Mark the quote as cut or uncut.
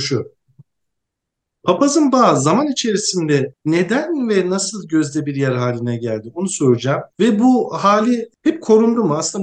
uncut